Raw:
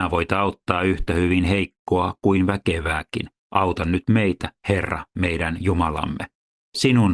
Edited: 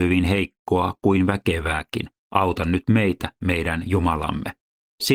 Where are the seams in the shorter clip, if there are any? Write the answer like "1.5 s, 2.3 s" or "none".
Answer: 3.4 s